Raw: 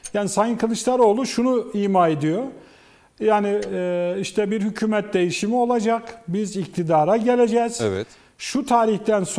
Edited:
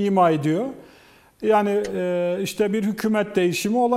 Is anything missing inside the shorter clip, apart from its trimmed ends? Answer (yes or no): no